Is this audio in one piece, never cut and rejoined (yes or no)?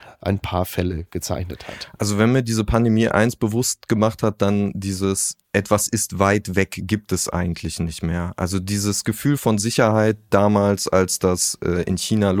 no